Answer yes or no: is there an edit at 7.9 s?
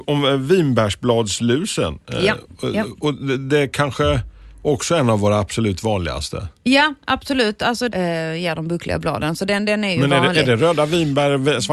yes